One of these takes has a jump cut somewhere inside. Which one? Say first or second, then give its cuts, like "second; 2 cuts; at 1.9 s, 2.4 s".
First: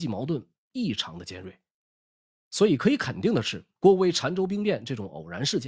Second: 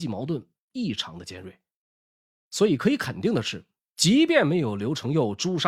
first; 1 cut; at 3.8 s